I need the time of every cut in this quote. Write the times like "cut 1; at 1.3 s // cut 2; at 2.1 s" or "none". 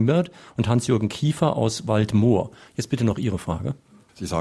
none